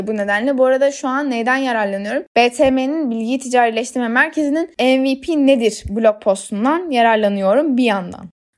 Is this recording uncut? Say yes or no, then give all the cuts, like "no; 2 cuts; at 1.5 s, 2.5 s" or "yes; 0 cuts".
yes; 0 cuts